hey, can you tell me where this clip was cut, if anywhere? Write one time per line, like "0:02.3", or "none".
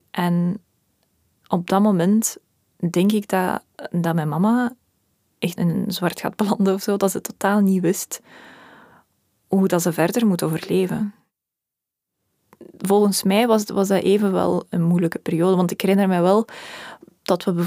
none